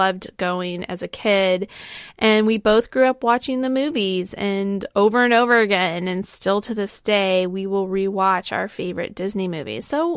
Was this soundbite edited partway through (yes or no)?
no